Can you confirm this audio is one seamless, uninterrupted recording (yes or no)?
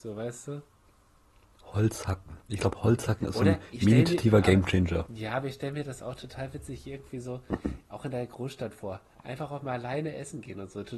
yes